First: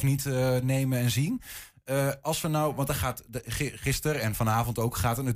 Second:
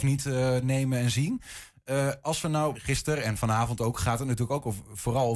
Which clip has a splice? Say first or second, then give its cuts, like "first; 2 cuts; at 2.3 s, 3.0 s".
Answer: second; 1 cut; at 2.7 s